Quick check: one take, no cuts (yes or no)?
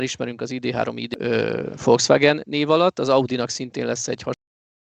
yes